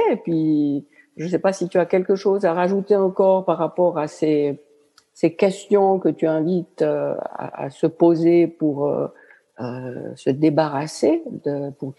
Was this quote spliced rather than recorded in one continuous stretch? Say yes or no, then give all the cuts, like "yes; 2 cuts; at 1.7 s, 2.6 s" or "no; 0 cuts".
no; 0 cuts